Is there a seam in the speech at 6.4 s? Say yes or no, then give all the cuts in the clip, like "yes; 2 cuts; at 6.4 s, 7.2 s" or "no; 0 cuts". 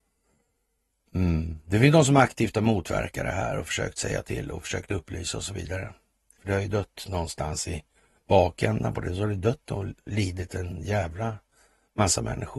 yes; 1 cut; at 6.4 s